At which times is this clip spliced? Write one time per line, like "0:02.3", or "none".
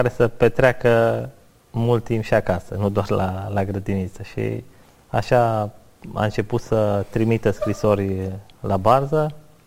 none